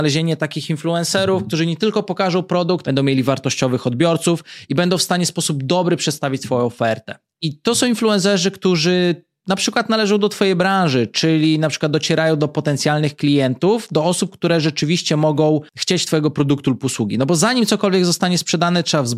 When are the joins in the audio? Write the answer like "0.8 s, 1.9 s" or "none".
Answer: 2.8 s